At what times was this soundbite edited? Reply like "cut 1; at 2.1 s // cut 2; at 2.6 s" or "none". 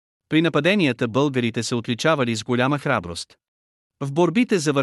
cut 1; at 3.9 s